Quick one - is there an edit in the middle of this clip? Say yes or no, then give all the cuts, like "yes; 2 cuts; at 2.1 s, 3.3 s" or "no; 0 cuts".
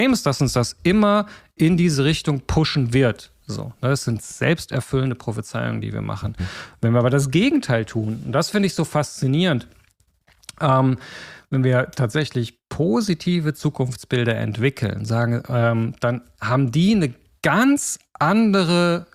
no; 0 cuts